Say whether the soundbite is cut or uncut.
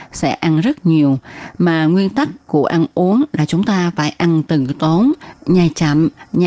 uncut